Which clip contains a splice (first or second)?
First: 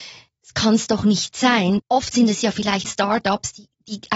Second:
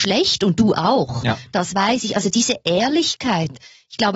first